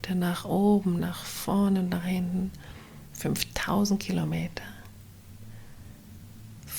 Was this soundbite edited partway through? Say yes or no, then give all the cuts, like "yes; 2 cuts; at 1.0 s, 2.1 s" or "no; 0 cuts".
yes; 1 cut; at 1.0 s